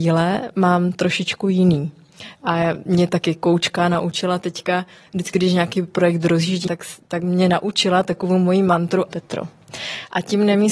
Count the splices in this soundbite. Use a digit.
2